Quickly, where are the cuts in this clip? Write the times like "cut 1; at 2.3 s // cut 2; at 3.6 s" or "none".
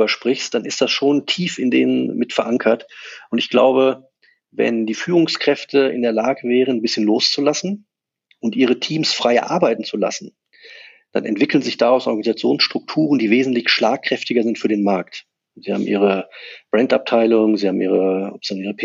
cut 1; at 15.5 s

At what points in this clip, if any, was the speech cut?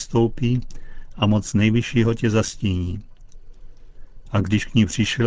cut 1; at 4.2 s

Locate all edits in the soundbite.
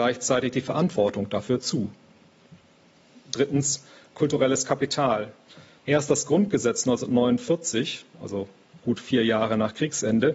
cut 1; at 5.8 s

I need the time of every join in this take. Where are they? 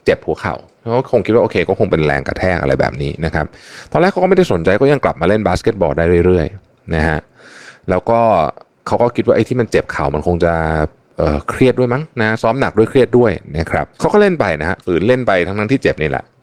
cut 1; at 13.9 s

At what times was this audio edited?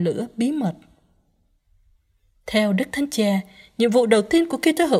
none

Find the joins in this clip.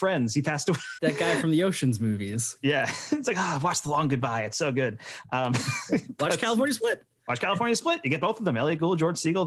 cut 1; at 1.0 s

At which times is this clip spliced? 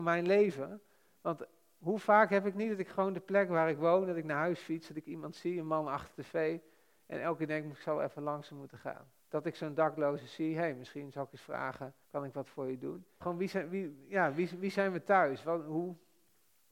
cut 1; at 9.2 s // cut 2; at 12.0 s // cut 3; at 13.2 s

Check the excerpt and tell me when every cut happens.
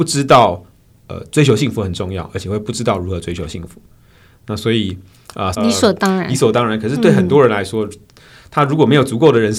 cut 1; at 5.5 s

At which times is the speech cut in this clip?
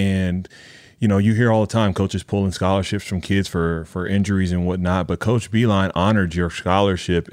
none

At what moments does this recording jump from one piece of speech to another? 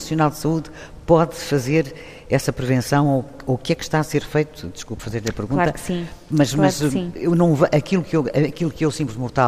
none

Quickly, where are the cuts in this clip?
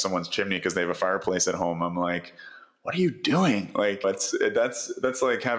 cut 1; at 4.0 s

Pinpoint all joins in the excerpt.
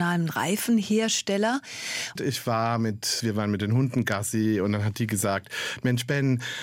cut 1; at 2.2 s // cut 2; at 3.2 s

